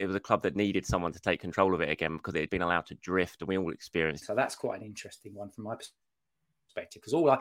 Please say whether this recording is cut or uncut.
cut